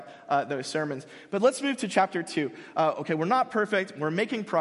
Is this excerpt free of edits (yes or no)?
yes